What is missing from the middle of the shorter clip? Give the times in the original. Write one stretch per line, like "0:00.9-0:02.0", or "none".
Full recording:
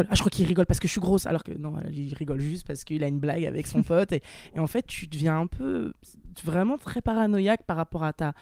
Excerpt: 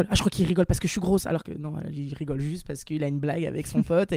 none